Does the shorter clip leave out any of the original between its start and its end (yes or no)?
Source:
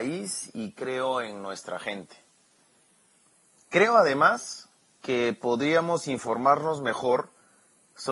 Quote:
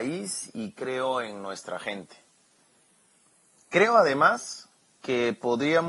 no